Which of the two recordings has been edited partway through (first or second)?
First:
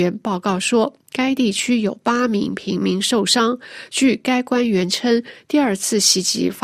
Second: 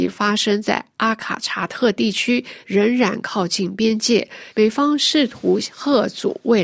second